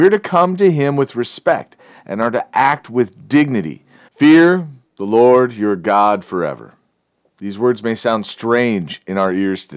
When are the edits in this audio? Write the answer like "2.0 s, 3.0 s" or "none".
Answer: 4.1 s